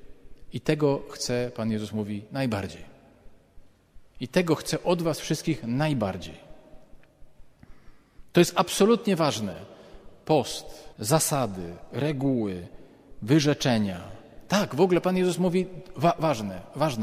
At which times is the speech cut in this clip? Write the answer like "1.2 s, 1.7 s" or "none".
10.9 s